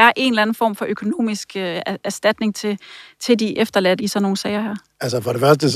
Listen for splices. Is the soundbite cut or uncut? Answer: cut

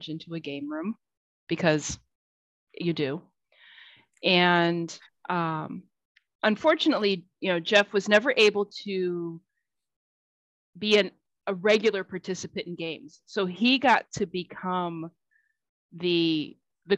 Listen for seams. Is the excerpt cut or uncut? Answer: uncut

